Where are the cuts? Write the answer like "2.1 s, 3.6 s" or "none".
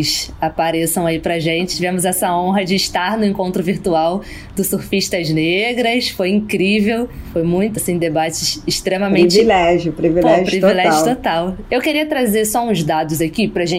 1.7 s, 7.8 s, 11.7 s